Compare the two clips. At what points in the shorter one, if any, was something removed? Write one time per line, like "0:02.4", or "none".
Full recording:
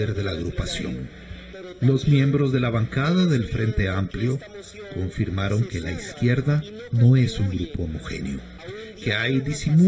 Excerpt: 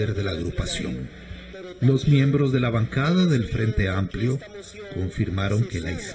none